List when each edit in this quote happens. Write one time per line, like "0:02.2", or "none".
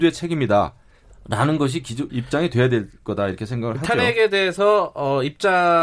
0:02.1